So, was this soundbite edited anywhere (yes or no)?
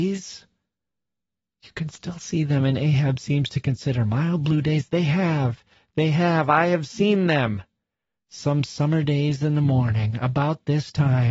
no